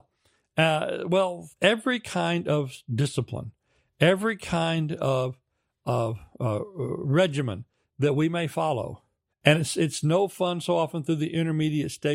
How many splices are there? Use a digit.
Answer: 2